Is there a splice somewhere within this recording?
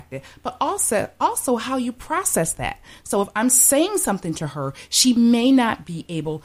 no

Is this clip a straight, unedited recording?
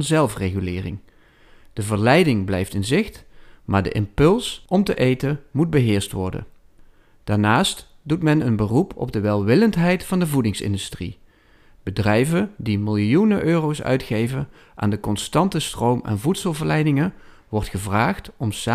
yes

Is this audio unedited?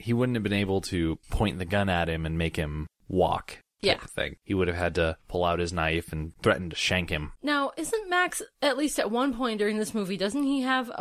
yes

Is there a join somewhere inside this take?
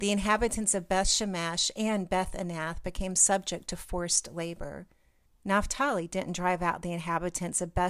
yes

